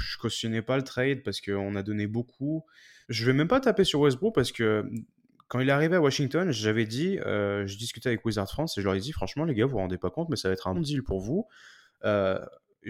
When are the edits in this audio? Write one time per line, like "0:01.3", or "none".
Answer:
0:03.0
0:10.7